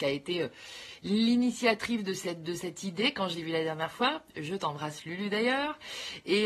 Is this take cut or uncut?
uncut